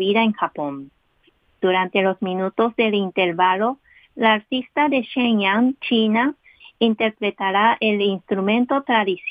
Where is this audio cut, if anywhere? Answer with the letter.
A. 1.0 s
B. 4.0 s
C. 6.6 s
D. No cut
C